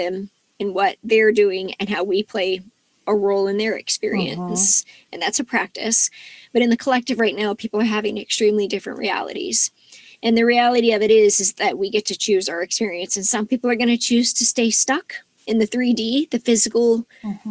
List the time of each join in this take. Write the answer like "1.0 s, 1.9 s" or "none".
none